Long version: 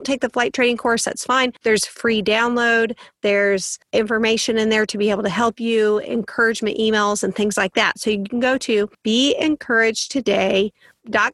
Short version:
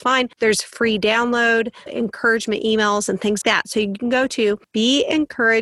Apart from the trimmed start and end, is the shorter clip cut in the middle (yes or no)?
yes